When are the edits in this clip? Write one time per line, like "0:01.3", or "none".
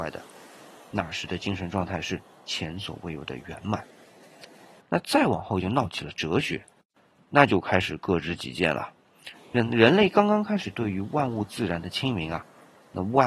0:04.8
0:09.3

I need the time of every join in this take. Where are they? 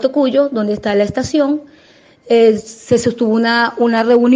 none

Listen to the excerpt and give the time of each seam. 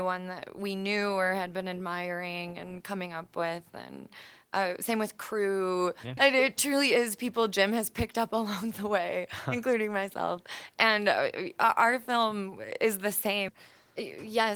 0:06.2
0:13.5

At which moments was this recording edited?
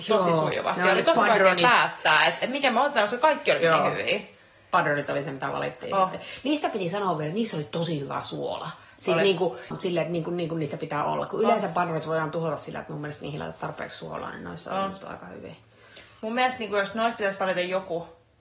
0:09.7

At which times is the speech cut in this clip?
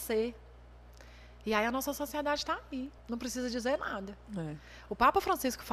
0:03.0

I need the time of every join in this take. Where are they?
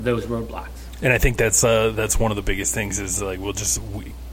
none

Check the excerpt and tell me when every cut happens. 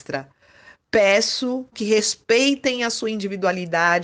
0:01.7

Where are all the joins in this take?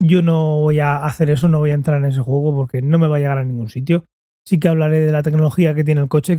none

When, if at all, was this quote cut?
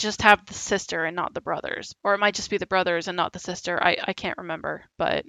0:01.9

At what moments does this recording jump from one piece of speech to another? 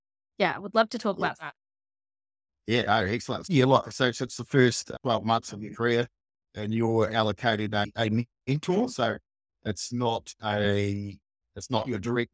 none

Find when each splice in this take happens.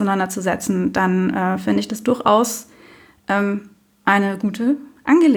none

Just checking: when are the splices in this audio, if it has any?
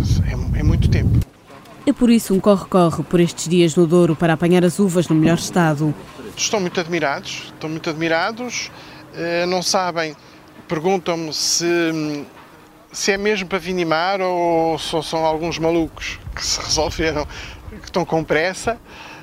0:06.4

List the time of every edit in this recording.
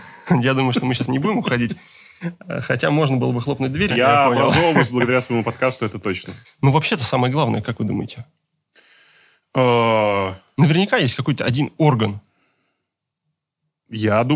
0:03.9
0:06.4

